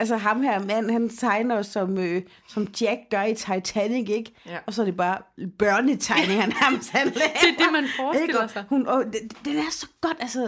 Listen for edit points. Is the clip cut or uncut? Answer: uncut